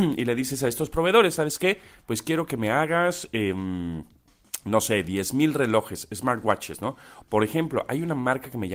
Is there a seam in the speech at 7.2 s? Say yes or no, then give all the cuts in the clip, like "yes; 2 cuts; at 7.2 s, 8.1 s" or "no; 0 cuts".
yes; 1 cut; at 7.2 s